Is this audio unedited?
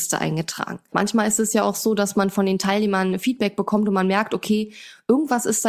no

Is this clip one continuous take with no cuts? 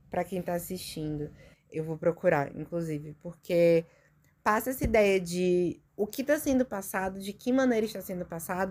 no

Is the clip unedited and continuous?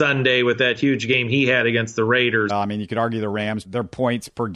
no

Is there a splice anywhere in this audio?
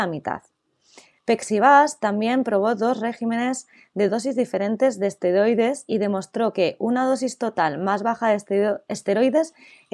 yes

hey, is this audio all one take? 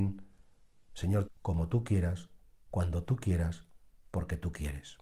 no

